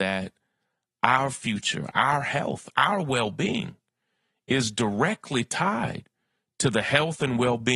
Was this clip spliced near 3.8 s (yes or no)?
no